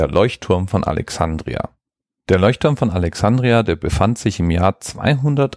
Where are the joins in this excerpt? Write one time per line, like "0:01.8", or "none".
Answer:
none